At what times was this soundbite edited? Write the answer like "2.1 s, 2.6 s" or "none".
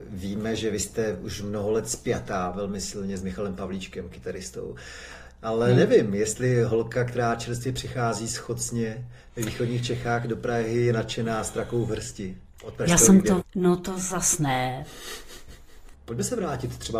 13.4 s, 15.9 s